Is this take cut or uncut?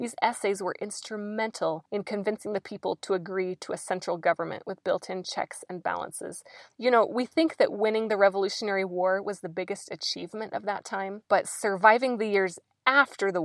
uncut